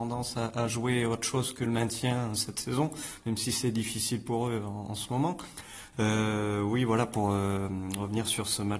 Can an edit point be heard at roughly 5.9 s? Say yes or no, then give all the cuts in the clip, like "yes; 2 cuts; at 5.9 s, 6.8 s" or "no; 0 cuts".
yes; 1 cut; at 5.9 s